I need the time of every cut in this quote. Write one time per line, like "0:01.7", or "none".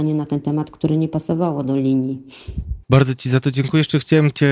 0:02.8